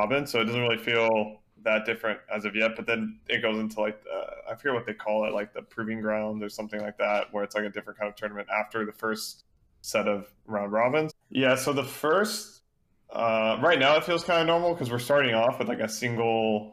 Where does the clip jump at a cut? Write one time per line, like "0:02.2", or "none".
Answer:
0:11.1